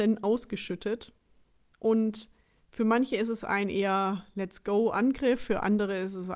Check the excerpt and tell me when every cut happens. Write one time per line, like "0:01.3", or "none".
none